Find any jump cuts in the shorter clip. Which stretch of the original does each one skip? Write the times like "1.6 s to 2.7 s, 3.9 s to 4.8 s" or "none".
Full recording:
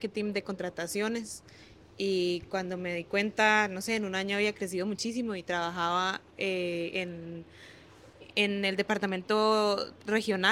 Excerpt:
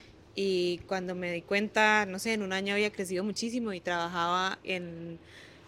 6.3 s to 6.9 s